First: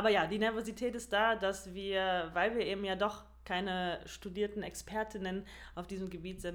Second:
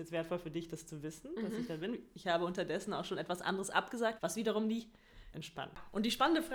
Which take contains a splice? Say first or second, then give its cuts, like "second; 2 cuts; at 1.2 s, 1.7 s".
second; 2 cuts; at 4.2 s, 5.3 s